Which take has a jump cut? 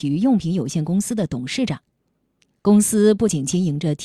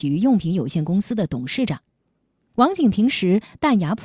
second; 1 cut; at 2.4 s

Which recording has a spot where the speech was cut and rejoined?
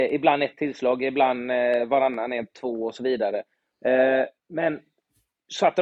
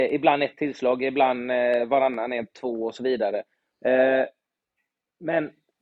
first; 1 cut; at 4.4 s

